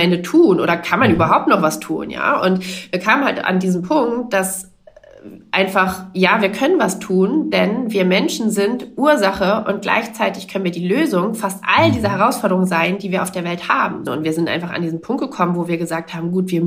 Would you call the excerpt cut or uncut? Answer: cut